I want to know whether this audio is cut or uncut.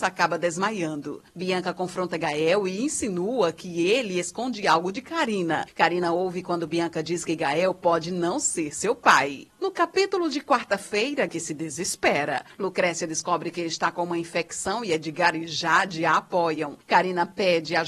cut